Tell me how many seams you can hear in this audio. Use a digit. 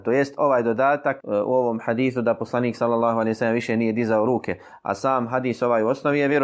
1